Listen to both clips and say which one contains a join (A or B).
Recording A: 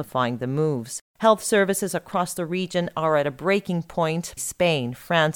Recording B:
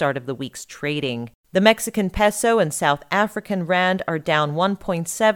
A